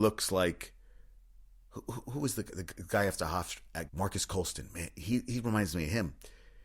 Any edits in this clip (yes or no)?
yes